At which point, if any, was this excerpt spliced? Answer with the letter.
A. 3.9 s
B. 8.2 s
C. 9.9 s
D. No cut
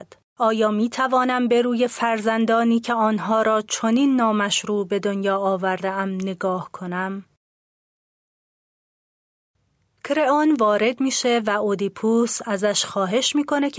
D